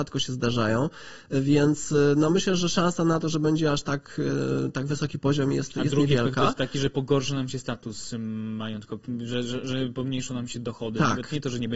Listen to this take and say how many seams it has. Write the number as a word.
zero